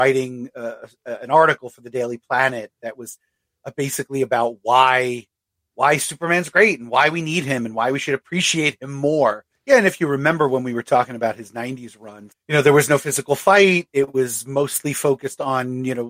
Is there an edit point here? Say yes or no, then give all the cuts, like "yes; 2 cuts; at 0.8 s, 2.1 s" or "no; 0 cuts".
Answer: yes; 2 cuts; at 9.5 s, 12.3 s